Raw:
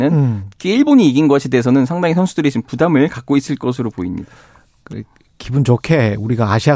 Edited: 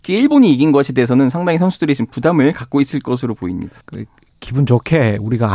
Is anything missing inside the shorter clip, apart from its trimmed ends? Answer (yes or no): yes